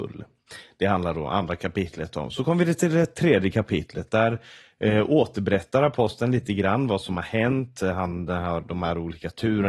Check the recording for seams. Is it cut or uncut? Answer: uncut